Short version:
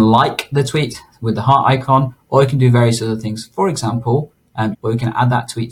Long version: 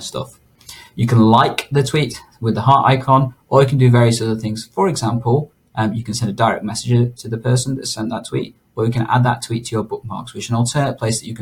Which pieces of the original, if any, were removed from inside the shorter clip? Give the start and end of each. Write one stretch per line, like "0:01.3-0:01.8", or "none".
0:05.9-0:08.7